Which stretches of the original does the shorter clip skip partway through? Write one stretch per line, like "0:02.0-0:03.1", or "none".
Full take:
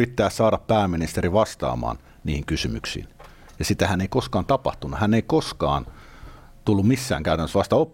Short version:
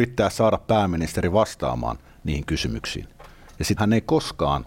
0:03.8-0:05.0